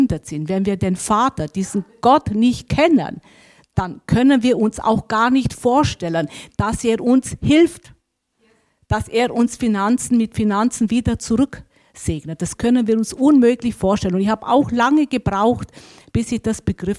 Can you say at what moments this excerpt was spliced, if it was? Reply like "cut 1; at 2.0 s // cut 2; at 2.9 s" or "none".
none